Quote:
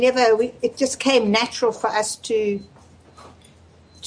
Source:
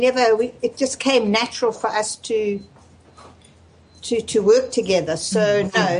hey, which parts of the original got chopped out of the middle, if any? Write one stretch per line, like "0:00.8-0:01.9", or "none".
none